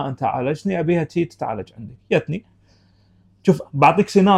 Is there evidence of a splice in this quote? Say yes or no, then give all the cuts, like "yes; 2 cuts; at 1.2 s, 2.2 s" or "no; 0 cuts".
no; 0 cuts